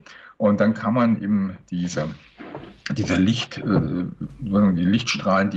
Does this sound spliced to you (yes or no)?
no